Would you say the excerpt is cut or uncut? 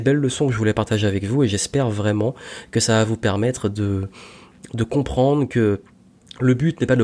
uncut